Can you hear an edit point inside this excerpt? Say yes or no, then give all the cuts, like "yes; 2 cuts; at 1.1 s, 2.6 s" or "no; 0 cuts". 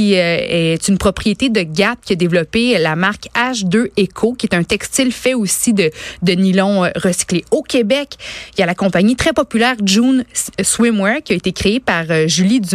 no; 0 cuts